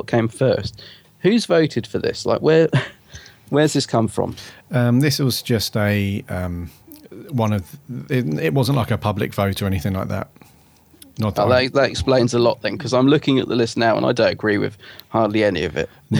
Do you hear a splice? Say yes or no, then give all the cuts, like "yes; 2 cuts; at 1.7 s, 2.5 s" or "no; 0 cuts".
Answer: no; 0 cuts